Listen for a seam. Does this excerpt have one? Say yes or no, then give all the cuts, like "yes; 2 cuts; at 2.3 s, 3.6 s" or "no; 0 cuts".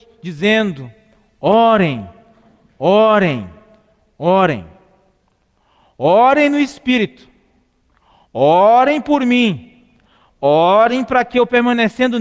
no; 0 cuts